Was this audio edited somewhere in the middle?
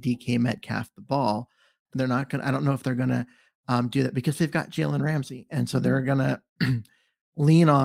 yes; 1 cut; at 1.9 s

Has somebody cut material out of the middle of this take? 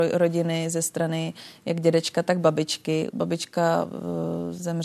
yes; 1 cut; at 3.1 s

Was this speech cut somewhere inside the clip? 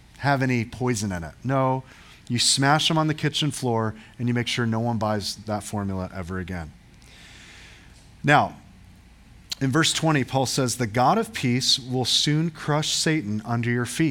no; 0 cuts

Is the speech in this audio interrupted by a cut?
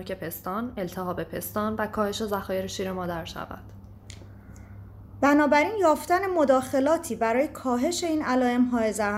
no; 0 cuts

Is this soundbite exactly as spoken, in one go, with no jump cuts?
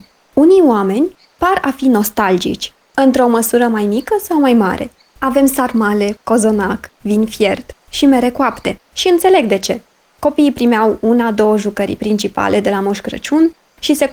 no; 2 cuts; at 5.0 s, 8.9 s

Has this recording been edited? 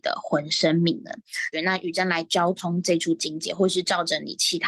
yes; 1 cut; at 1.5 s

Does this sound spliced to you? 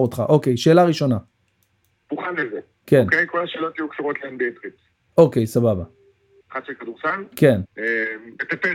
yes; 2 cuts; at 6.4 s, 7.6 s

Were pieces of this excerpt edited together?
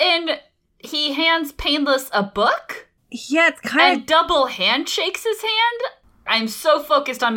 yes; 2 cuts; at 3.0 s, 6.3 s

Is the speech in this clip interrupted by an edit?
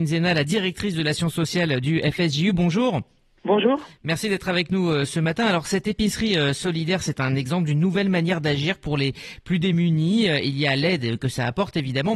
no; 0 cuts

